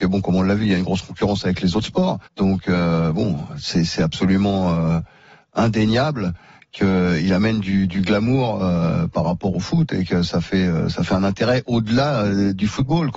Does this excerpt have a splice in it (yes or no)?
yes